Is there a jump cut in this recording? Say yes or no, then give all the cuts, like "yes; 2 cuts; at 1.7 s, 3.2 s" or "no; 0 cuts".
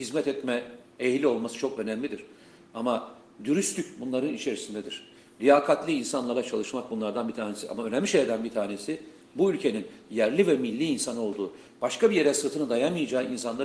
no; 0 cuts